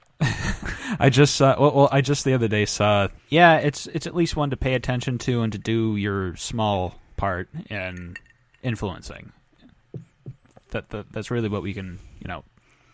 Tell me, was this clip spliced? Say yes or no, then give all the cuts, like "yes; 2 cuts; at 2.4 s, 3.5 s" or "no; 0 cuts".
yes; 1 cut; at 3.2 s